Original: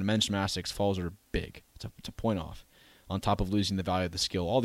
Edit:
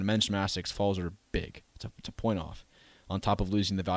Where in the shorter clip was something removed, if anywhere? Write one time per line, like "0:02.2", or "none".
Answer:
none